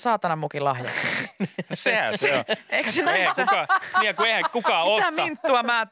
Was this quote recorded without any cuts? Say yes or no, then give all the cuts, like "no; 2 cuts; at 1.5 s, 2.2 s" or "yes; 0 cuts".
yes; 0 cuts